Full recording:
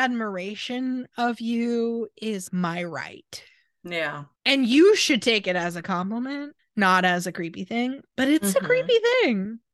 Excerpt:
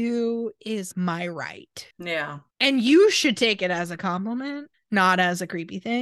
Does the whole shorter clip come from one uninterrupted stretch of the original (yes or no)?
no